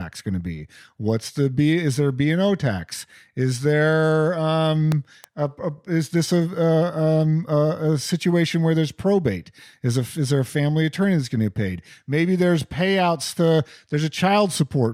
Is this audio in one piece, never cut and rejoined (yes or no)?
yes